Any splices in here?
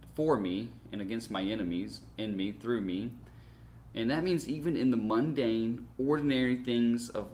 yes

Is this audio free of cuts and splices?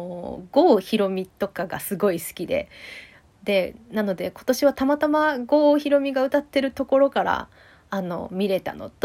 yes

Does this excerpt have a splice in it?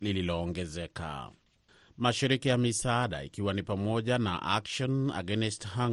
no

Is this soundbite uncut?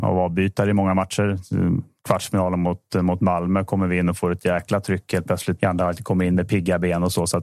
no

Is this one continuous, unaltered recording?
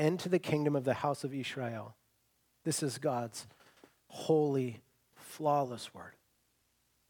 no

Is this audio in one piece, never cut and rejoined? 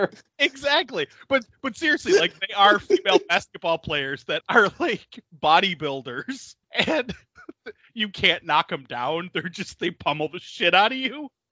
no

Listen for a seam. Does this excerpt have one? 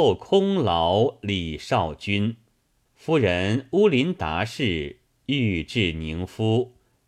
yes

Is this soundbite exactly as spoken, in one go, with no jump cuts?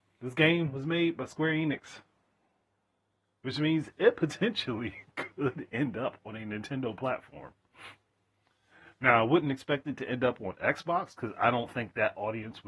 yes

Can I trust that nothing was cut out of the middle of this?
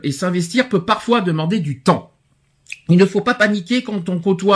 yes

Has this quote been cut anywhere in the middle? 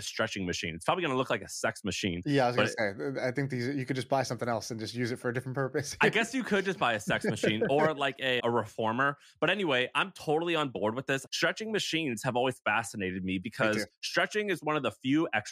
yes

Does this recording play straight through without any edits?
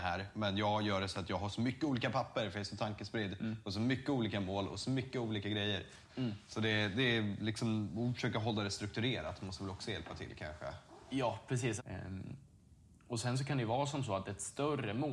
no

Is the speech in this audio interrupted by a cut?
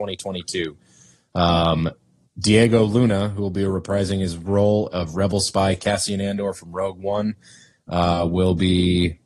no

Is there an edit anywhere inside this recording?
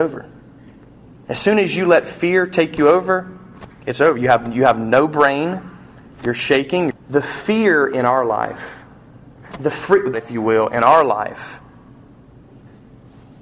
yes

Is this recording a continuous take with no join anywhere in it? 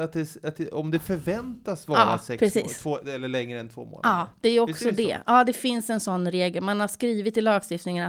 yes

